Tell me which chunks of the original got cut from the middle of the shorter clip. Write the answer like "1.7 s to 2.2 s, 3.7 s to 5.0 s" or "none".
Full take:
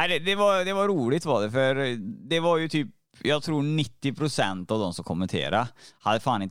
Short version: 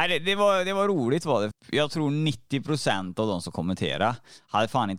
1.5 s to 3.0 s